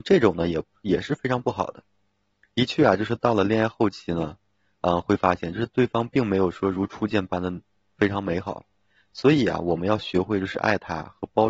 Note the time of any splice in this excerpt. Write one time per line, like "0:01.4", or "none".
none